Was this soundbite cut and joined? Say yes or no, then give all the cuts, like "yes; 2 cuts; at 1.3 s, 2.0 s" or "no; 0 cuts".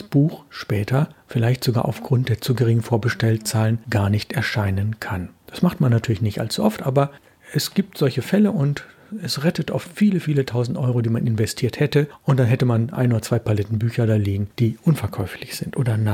no; 0 cuts